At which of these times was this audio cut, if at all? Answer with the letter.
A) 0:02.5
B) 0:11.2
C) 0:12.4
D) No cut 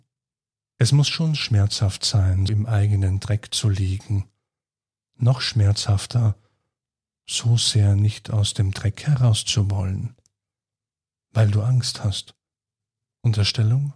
A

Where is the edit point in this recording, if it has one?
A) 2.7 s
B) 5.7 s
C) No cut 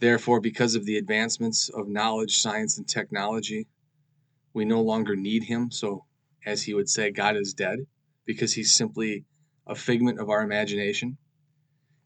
C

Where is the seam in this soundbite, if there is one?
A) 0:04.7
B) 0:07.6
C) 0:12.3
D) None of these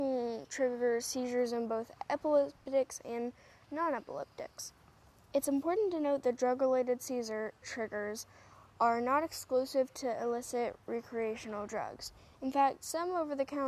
B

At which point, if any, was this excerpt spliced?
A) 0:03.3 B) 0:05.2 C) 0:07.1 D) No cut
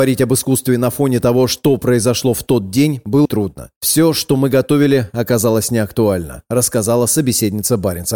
A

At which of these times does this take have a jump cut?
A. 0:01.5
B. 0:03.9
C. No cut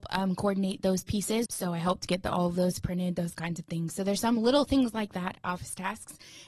A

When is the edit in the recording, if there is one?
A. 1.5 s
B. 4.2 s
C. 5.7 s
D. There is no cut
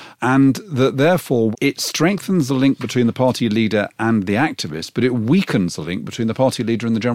A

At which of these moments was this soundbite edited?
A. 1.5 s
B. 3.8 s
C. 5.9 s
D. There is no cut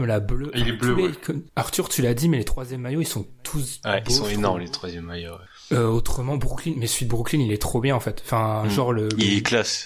A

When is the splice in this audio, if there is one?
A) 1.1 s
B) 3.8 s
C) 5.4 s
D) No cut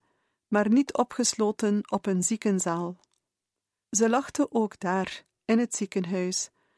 B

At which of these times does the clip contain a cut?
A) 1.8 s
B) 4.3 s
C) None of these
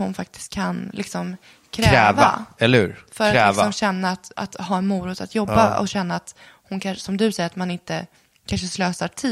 B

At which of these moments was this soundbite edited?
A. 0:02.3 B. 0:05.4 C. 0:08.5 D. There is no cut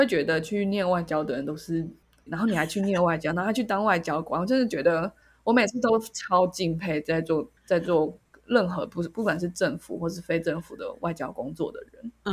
A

